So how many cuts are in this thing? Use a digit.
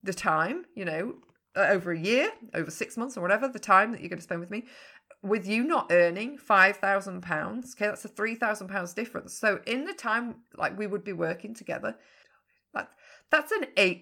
0